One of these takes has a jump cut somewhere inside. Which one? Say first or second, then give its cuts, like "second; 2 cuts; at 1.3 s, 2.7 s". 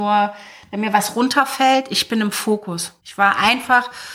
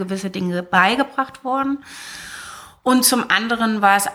first; 1 cut; at 3.0 s